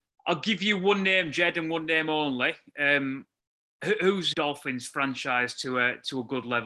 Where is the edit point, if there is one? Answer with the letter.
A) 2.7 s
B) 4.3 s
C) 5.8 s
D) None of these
B